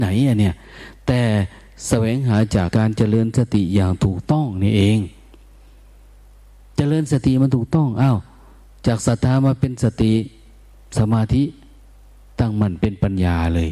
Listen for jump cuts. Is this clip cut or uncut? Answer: cut